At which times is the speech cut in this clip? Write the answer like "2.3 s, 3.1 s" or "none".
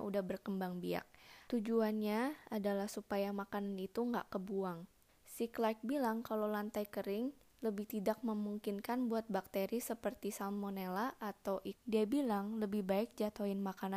1.5 s, 5.1 s, 11.7 s